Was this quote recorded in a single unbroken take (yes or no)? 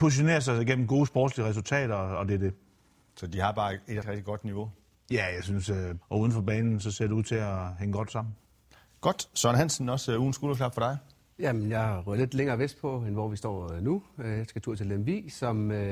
no